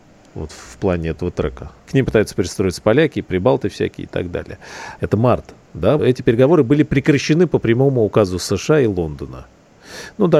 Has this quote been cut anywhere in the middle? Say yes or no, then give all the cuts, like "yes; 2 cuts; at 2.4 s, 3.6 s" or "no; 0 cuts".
yes; 3 cuts; at 1.8 s, 5.0 s, 6.0 s